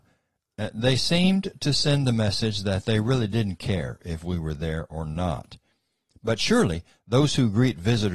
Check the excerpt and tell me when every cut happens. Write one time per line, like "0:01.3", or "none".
none